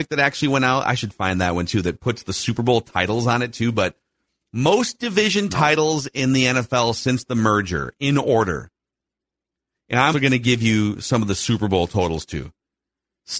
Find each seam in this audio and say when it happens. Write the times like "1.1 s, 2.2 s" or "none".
10.1 s